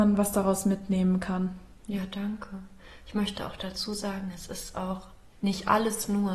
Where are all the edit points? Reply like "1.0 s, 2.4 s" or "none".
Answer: 5.3 s